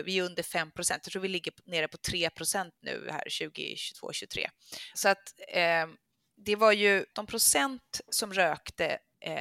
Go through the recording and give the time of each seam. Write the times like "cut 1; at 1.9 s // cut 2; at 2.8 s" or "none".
cut 1; at 4.9 s // cut 2; at 7.1 s